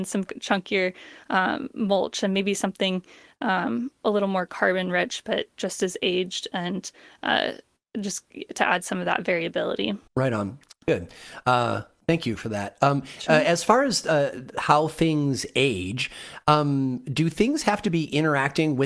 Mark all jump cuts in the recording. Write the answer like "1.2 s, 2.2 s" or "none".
10.1 s